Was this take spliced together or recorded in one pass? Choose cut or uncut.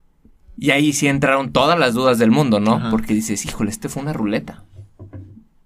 uncut